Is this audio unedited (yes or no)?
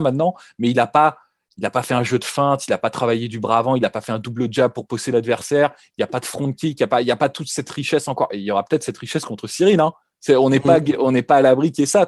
yes